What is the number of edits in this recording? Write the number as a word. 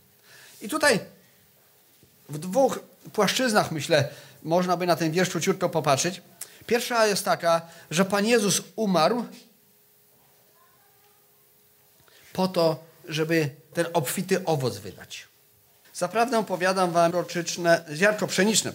three